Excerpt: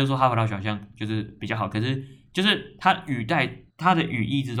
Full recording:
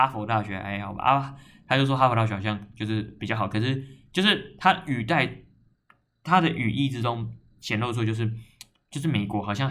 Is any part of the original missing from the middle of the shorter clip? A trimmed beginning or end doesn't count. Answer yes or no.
yes